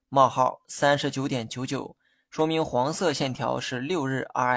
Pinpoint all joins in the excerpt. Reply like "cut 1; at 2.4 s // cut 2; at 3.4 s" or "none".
none